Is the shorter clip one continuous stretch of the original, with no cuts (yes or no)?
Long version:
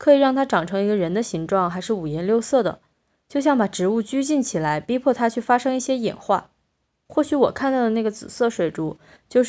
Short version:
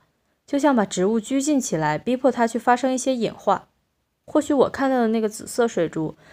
yes